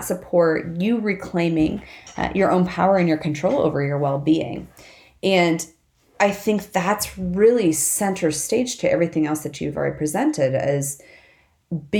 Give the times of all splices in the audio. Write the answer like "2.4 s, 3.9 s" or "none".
none